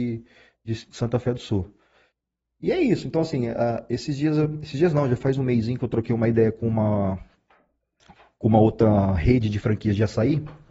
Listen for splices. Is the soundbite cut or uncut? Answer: uncut